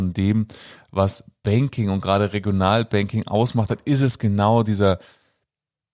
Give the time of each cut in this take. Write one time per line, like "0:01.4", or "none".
none